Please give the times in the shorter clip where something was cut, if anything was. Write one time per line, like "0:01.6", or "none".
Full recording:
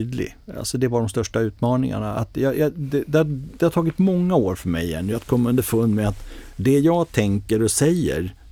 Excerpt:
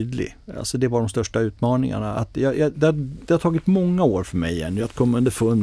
0:02.7

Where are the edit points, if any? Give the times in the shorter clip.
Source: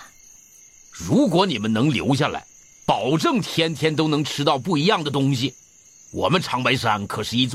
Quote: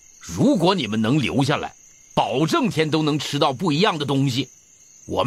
0:02.7

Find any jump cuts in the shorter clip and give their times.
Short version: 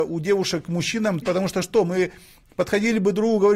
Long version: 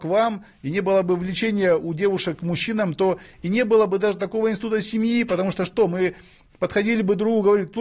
0:01.2

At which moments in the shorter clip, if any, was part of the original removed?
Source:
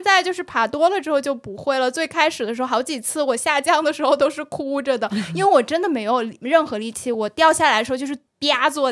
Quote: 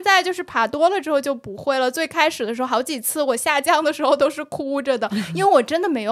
none

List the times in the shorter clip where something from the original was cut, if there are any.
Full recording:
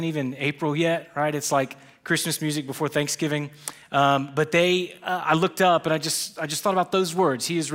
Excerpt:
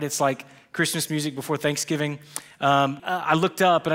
0:03.0

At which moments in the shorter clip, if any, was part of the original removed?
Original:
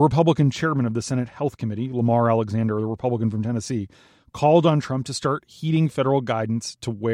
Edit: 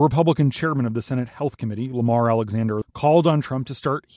0:02.8

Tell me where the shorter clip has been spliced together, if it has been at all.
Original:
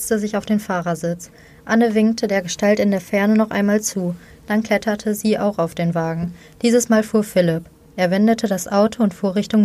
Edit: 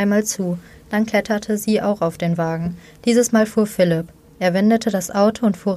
none

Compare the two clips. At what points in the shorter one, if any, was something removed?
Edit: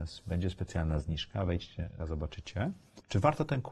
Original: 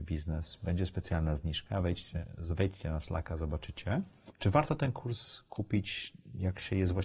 0:02.0

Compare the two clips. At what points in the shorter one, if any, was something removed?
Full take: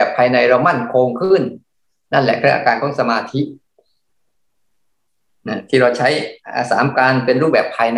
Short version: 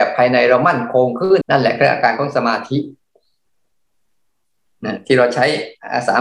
0:01.4

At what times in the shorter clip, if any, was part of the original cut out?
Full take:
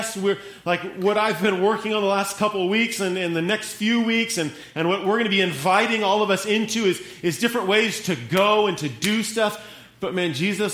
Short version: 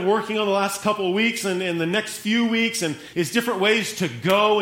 0:03.1

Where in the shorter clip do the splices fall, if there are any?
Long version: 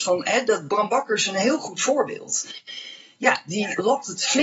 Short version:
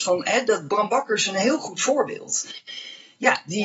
none

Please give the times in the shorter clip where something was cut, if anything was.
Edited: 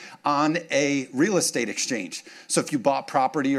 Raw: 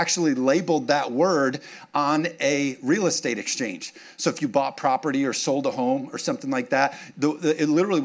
none

